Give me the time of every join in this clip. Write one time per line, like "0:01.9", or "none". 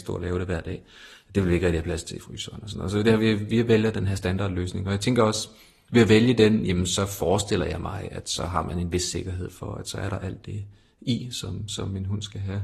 none